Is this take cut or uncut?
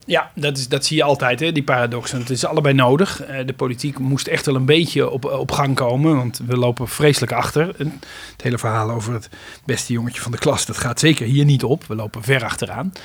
uncut